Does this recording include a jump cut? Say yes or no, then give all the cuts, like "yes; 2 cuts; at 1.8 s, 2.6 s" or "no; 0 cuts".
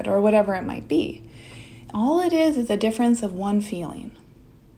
no; 0 cuts